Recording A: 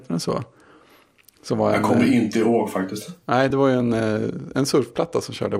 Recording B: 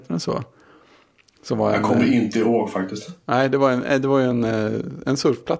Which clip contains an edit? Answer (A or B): A